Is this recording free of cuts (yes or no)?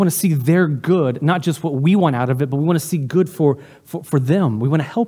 yes